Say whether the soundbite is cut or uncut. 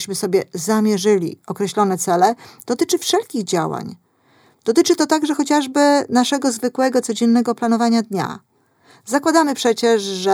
uncut